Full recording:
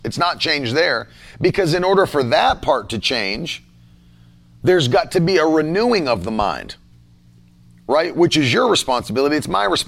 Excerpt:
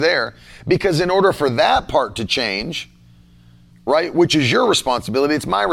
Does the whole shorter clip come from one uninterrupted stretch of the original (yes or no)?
no